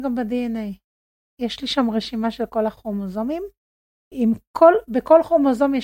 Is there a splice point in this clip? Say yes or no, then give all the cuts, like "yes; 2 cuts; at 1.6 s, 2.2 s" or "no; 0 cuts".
no; 0 cuts